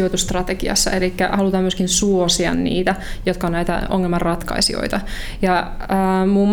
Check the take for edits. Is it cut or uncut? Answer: uncut